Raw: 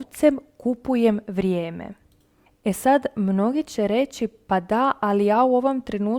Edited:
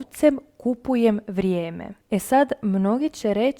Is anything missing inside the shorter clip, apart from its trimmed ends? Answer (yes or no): yes